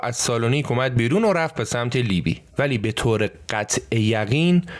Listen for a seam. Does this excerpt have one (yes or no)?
yes